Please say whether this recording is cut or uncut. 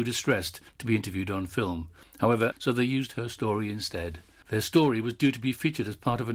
cut